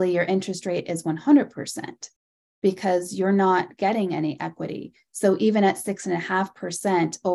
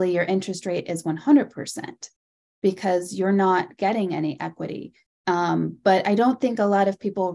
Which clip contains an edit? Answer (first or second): second